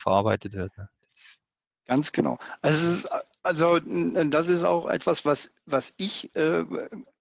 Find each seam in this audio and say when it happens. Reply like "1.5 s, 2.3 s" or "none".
none